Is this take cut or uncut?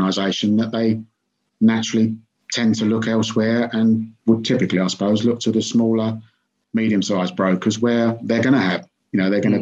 uncut